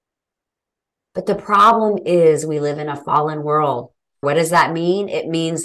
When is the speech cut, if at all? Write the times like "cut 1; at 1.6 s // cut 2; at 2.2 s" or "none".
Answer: cut 1; at 1.0 s // cut 2; at 4.2 s